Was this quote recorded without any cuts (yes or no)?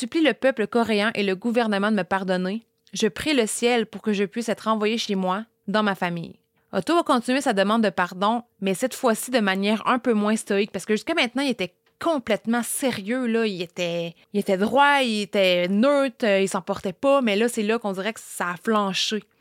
no